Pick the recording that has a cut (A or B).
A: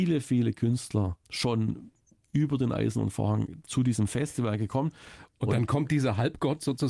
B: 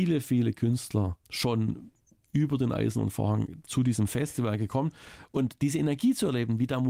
A